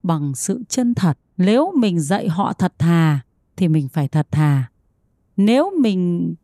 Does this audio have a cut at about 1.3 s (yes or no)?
yes